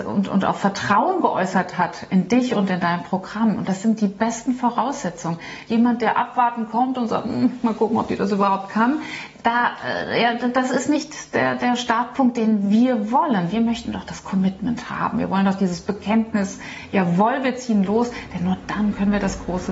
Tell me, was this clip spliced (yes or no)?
no